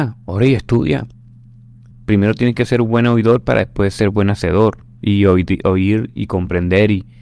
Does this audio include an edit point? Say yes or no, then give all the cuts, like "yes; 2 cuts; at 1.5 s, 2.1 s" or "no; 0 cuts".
yes; 1 cut; at 1.9 s